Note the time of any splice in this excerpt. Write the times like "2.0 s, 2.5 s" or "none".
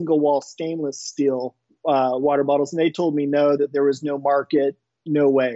3.6 s